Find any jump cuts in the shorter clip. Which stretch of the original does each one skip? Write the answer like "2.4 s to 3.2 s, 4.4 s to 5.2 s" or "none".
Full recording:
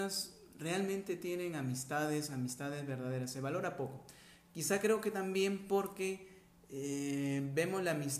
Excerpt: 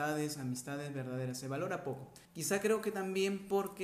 4.2 s to 4.4 s